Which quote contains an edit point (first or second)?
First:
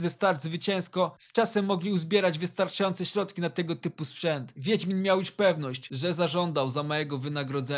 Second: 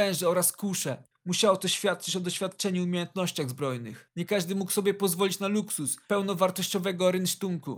second